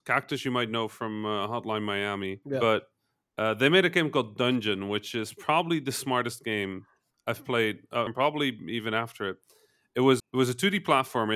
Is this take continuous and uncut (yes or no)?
no